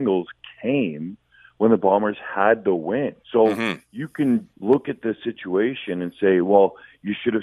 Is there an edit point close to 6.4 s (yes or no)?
no